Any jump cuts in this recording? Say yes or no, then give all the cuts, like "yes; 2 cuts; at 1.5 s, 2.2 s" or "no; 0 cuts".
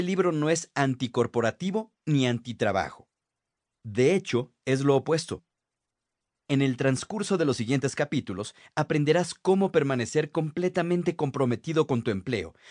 no; 0 cuts